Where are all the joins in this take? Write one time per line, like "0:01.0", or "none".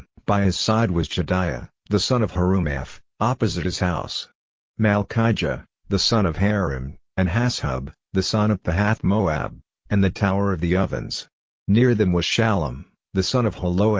0:04.6
0:09.7